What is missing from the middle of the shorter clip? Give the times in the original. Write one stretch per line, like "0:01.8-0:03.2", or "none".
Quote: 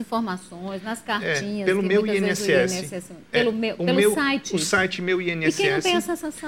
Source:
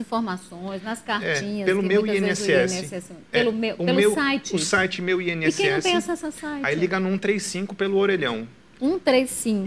none